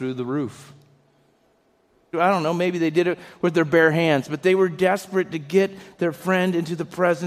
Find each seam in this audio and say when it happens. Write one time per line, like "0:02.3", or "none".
0:02.1